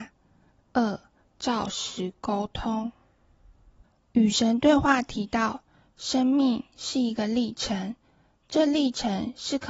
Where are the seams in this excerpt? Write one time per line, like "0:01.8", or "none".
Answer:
none